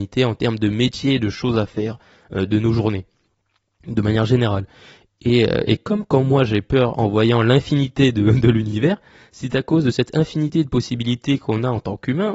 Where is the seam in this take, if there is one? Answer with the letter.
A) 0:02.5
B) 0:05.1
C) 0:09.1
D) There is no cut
D